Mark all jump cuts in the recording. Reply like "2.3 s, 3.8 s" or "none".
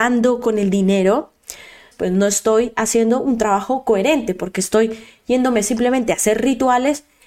1.9 s